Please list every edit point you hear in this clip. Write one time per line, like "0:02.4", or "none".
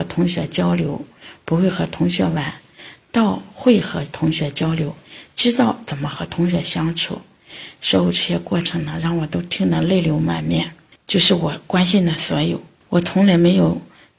0:11.0
0:12.8